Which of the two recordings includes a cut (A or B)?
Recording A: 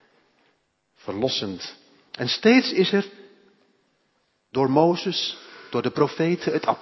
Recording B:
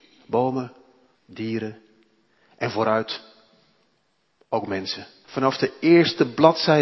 B